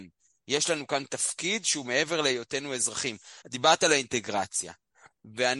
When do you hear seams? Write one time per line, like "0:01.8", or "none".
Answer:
0:03.4